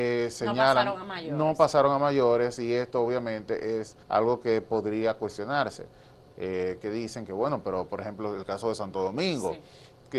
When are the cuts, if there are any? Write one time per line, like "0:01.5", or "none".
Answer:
0:04.0
0:06.3